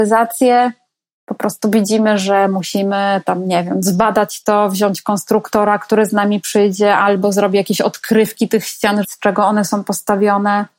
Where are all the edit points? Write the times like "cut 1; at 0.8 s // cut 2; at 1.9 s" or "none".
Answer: cut 1; at 9.0 s

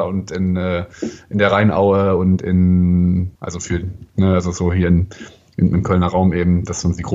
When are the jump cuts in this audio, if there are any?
cut 1; at 3.4 s

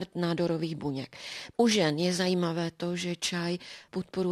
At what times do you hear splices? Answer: cut 1; at 1.5 s

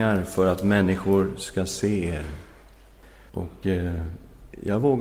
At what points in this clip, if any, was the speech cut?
cut 1; at 3.3 s

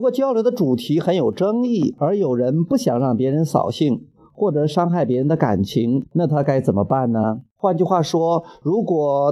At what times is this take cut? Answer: cut 1; at 6.0 s // cut 2; at 7.6 s

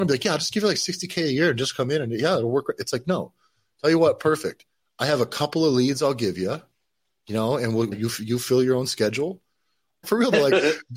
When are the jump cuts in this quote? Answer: cut 1; at 7.9 s // cut 2; at 10.0 s

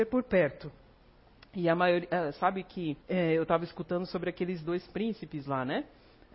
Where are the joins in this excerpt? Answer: cut 1; at 3.0 s

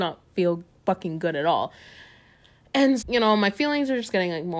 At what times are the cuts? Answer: cut 1; at 3.0 s

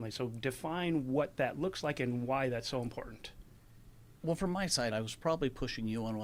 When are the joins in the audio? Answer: cut 1; at 4.9 s

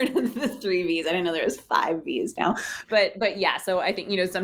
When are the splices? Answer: none

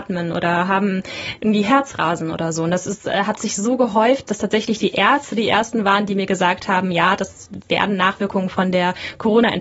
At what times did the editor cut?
none

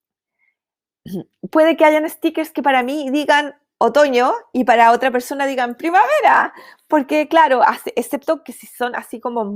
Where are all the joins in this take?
none

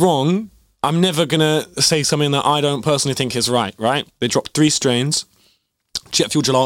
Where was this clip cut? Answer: cut 1; at 4.1 s

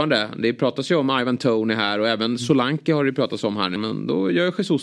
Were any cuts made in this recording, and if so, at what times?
cut 1; at 3.8 s

